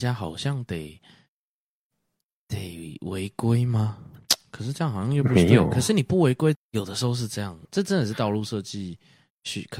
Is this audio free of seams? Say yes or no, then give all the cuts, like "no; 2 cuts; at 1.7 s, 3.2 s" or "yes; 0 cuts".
no; 2 cuts; at 6.5 s, 7.6 s